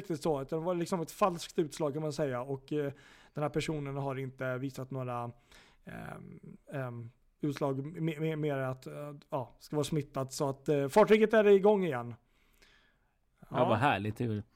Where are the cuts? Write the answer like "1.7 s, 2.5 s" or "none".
6.6 s